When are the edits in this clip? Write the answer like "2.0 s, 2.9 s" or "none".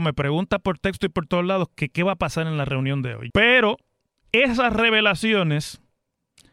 3.3 s

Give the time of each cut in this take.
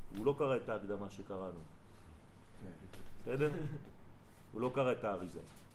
none

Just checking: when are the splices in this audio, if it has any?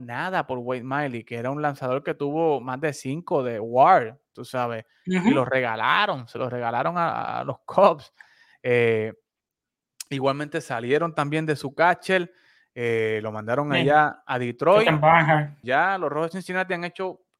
15.6 s

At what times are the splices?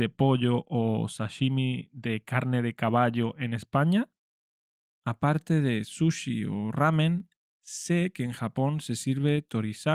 4.8 s

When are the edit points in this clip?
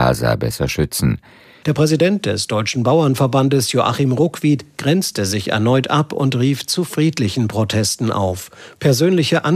1.6 s

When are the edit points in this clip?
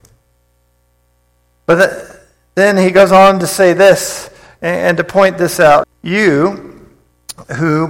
5.8 s

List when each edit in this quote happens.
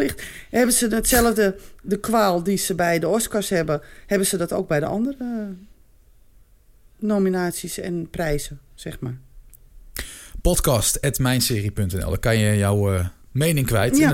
13.2 s

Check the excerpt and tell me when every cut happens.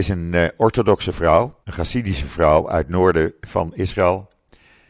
1.6 s

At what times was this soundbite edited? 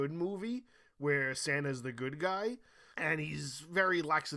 2.9 s

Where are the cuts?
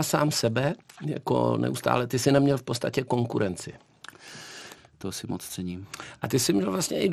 4.8 s

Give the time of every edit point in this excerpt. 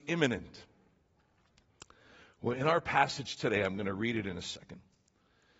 none

